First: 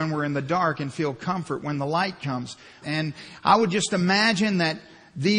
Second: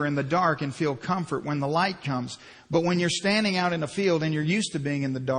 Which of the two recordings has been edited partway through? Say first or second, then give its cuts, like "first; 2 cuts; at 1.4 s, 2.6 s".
first; 1 cut; at 2.8 s